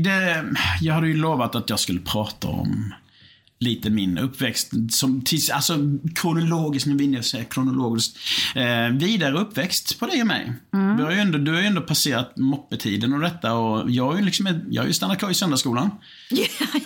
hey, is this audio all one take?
yes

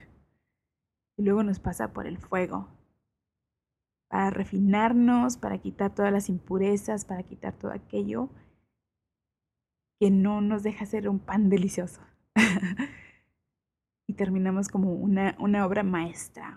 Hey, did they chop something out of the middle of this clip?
no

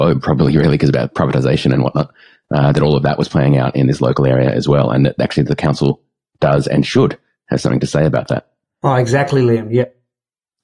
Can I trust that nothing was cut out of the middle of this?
yes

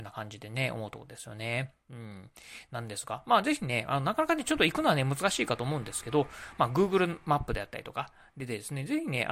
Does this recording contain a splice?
no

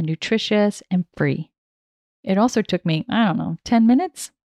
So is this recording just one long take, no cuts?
yes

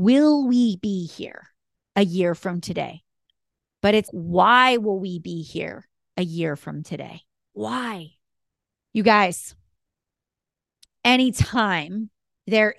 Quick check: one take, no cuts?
no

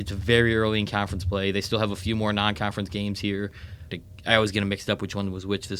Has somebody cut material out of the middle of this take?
yes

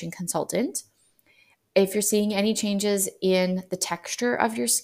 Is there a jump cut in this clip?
no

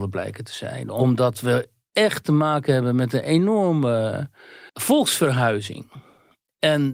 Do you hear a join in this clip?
yes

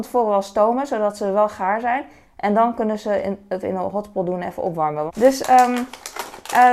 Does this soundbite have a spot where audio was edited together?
yes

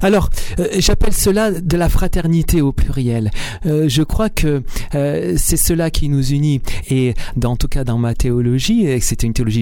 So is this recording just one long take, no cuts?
no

